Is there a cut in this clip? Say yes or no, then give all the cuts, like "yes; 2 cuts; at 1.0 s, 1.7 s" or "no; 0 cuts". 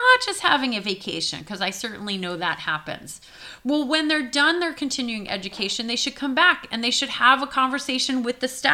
no; 0 cuts